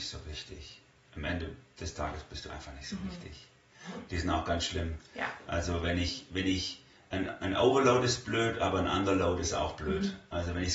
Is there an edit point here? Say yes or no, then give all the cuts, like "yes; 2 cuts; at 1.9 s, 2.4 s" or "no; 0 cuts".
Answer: yes; 1 cut; at 4.1 s